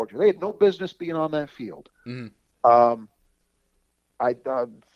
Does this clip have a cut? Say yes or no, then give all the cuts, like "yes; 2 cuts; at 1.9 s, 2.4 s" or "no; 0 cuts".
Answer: yes; 1 cut; at 1.9 s